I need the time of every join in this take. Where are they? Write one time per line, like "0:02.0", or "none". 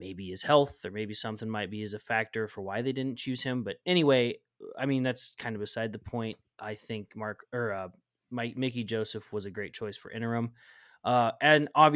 none

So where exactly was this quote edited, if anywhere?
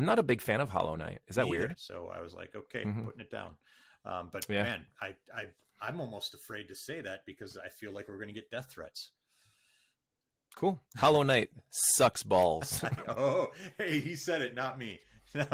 0:01.7

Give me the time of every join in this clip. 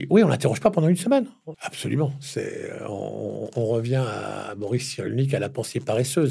0:01.5

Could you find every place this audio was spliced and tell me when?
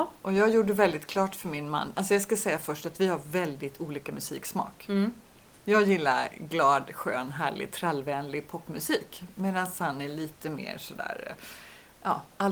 none

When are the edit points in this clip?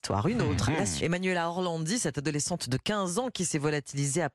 0:01.0

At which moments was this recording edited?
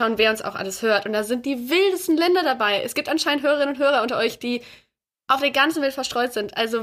none

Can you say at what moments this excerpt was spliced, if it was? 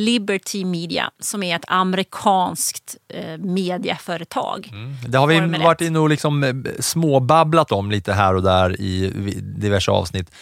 none

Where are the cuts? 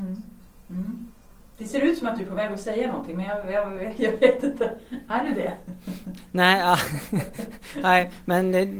none

